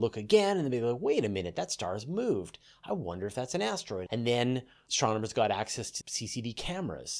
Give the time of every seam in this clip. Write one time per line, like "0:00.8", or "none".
0:04.1
0:06.0